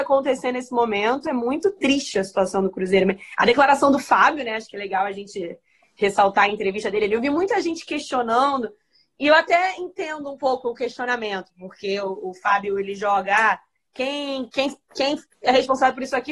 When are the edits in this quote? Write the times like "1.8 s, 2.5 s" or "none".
none